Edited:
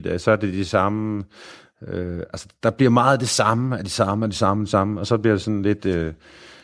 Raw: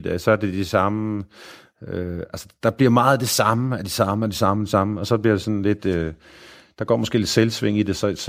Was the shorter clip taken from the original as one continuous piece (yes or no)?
yes